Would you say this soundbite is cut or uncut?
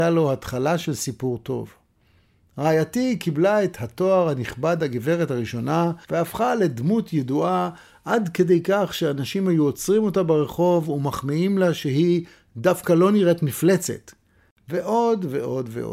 cut